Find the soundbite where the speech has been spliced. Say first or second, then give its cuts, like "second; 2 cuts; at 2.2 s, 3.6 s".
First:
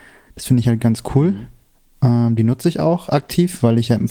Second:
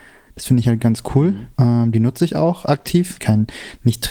second; 2 cuts; at 1.5 s, 3.2 s